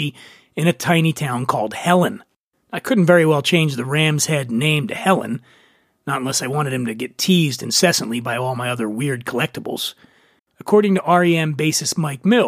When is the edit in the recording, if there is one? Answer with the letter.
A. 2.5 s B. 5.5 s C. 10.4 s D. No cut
C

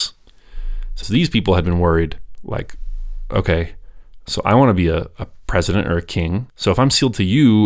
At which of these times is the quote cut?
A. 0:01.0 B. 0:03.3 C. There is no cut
A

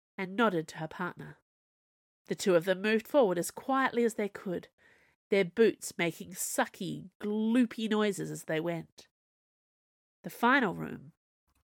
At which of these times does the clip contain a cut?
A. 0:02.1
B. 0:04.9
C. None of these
C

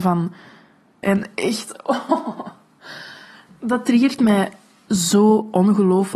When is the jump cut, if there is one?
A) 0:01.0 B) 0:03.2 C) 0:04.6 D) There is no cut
A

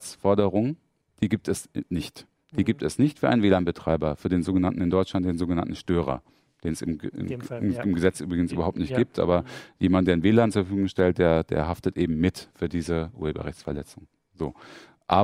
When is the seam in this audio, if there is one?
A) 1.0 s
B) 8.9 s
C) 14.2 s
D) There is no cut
A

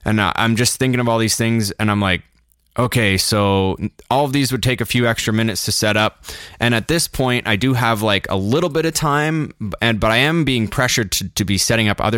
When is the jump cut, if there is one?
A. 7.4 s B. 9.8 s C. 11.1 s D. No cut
D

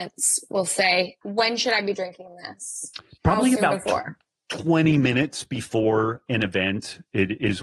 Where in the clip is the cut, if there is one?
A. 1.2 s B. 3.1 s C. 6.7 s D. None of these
A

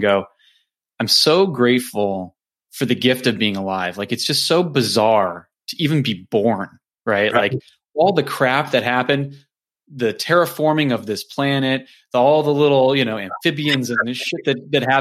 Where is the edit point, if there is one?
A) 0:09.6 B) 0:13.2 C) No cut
C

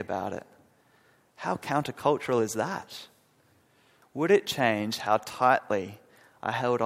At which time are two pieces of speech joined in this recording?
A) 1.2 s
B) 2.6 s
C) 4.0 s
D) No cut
C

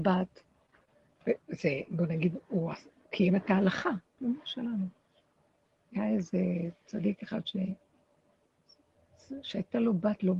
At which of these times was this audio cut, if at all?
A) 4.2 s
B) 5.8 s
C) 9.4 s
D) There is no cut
A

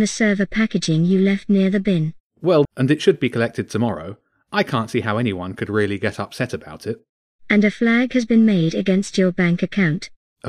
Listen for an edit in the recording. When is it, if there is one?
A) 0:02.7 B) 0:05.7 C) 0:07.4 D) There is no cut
A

